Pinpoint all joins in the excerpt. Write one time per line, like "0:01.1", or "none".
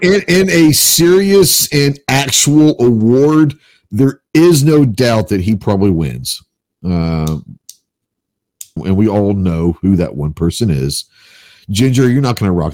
0:08.8